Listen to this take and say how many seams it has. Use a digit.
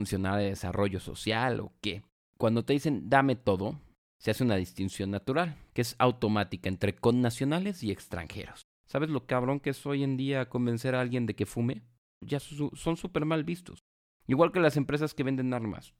1